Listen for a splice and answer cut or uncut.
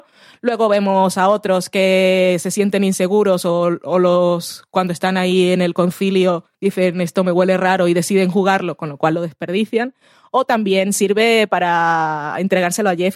uncut